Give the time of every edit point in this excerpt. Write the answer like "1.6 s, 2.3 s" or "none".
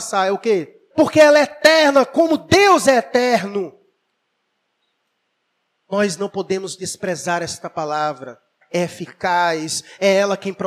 0.9 s, 8.6 s